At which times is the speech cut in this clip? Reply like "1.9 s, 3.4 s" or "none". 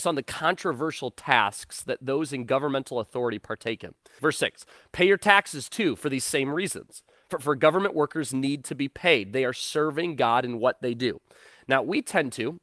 4.2 s